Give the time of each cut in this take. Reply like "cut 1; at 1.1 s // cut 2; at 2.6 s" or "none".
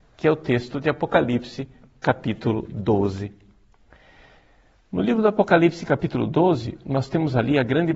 none